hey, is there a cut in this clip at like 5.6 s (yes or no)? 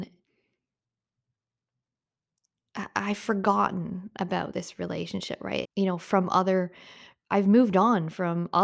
yes